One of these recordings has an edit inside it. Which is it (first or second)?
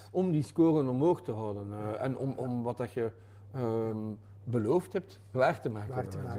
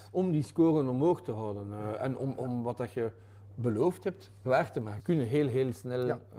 second